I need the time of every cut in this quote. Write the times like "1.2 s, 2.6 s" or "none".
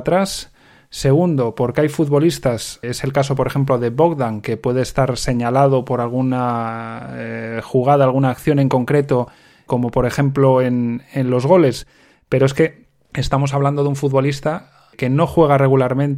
2.8 s